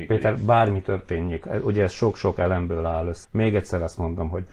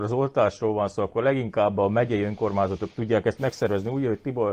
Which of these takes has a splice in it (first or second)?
first